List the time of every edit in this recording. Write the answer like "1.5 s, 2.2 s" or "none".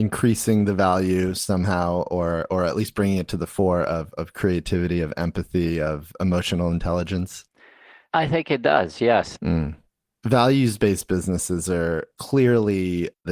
9.4 s